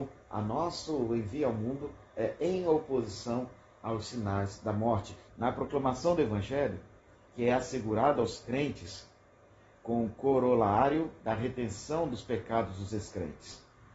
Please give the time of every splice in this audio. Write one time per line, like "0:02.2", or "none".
0:05.3
0:07.3